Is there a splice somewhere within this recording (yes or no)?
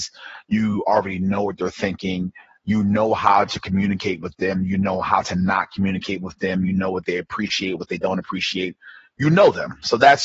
no